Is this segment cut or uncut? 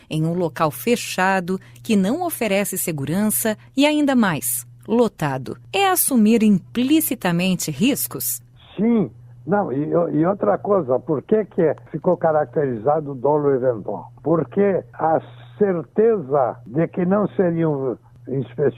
uncut